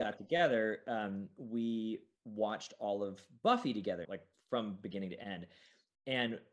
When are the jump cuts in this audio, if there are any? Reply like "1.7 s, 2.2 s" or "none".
4.0 s